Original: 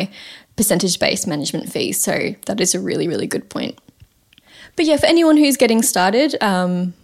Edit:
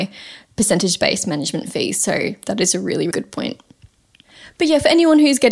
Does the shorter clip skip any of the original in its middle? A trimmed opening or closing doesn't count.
yes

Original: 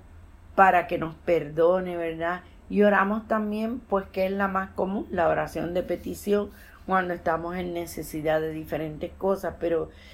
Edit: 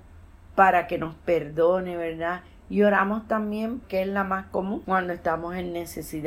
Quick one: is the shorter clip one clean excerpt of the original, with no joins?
no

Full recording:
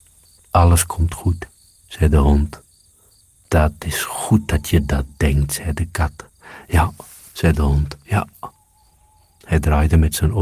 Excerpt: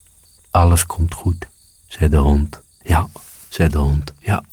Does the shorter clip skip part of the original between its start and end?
yes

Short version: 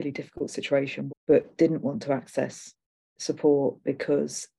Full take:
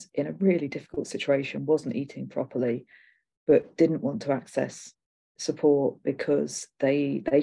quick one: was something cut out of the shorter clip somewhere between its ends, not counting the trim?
yes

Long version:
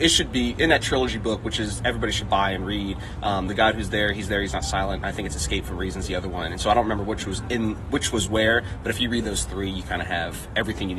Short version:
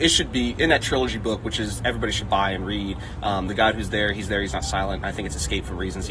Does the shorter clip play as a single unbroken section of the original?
yes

